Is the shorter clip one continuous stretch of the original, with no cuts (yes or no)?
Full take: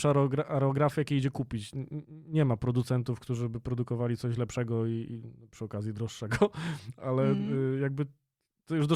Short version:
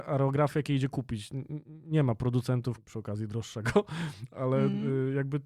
no